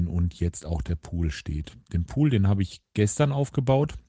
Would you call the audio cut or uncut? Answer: uncut